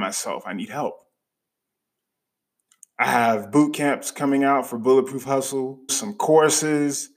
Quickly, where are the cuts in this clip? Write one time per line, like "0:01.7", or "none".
0:02.8
0:05.9